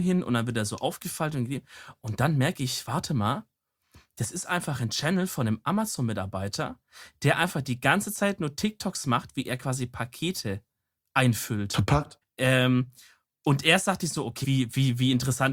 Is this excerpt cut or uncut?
cut